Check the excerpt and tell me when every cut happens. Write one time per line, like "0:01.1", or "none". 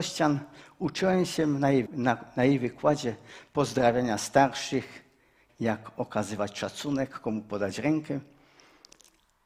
0:01.8
0:05.5